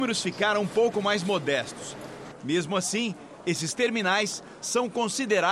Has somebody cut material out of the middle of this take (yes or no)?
yes